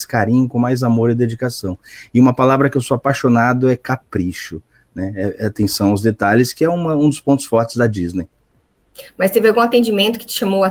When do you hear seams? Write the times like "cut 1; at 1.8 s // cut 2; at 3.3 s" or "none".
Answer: none